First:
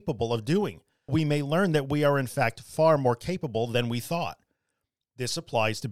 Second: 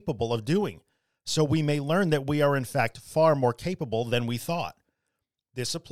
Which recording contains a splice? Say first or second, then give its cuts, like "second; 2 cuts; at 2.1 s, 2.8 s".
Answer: first; 1 cut; at 1.1 s